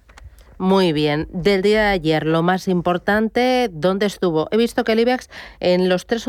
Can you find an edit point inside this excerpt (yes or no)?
no